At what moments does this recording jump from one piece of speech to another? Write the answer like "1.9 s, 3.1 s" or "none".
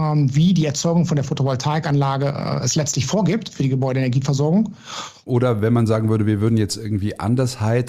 5.3 s